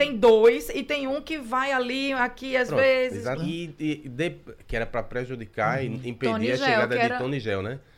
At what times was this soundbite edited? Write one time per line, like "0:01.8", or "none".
0:03.4